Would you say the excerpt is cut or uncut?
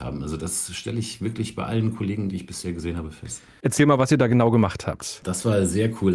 cut